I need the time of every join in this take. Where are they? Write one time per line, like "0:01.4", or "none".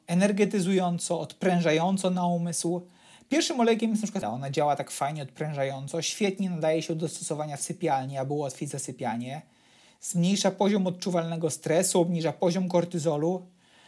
0:04.2